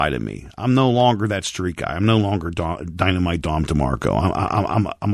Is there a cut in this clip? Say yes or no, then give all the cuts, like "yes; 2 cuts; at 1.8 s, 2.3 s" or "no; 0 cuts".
no; 0 cuts